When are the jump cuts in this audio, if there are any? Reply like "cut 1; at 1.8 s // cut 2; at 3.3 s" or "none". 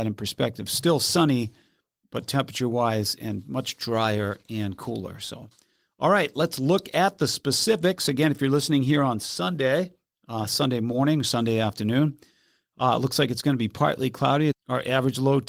cut 1; at 14.5 s

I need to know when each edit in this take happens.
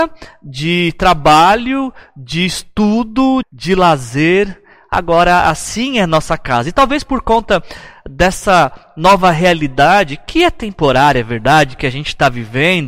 cut 1; at 3.4 s

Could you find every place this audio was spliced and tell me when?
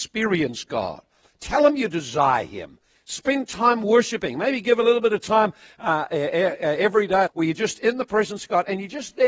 cut 1; at 7.3 s

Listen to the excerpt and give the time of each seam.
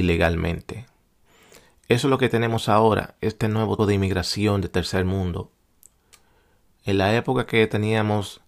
cut 1; at 3.8 s

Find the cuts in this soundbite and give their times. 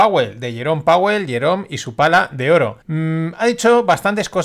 cut 1; at 2.8 s

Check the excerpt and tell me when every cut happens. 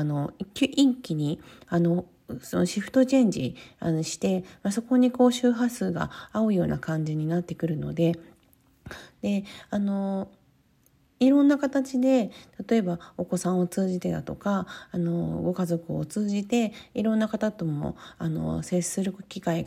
cut 1; at 9.1 s

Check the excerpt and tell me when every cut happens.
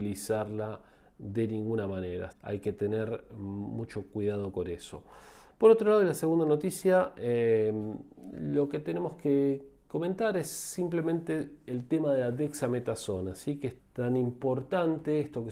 cut 1; at 2.3 s // cut 2; at 13.8 s

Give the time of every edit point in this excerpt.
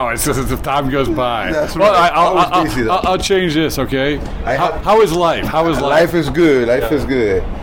none

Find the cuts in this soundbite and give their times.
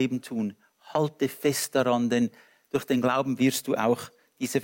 none

